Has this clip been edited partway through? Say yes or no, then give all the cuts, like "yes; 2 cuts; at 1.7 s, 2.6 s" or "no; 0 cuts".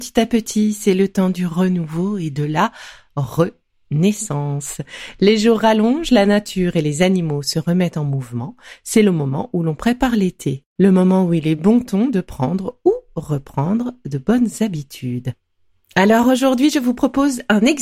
no; 0 cuts